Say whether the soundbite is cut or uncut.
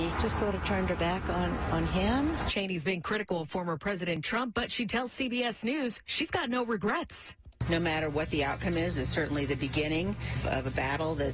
uncut